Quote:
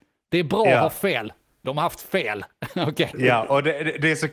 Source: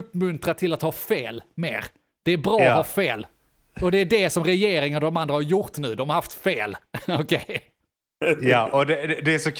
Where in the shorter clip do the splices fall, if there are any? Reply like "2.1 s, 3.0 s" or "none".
1.6 s, 3.1 s